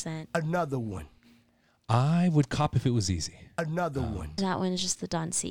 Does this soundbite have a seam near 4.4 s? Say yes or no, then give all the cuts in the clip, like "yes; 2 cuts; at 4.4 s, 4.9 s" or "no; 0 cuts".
yes; 1 cut; at 4.4 s